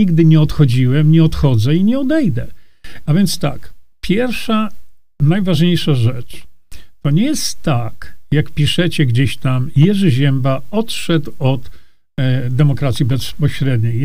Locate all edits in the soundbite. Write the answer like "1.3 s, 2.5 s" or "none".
3.1 s